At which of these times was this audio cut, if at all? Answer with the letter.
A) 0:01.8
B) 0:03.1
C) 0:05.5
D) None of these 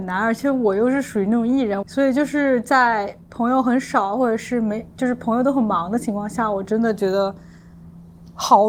A